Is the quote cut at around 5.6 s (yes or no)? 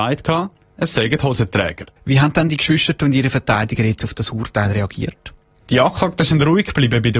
no